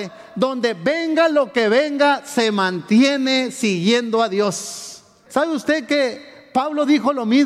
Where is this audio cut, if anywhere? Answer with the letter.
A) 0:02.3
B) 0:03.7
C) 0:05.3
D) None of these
C